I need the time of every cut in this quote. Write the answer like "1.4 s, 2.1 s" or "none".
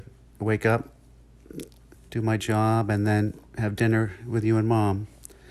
1.9 s